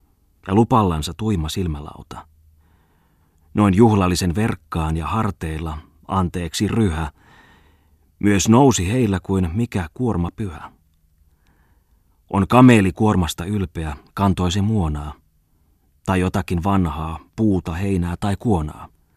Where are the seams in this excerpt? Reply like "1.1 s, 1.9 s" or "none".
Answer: none